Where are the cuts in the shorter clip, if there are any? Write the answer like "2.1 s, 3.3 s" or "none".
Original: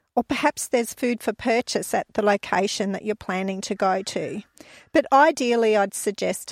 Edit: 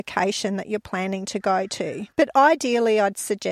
2.1 s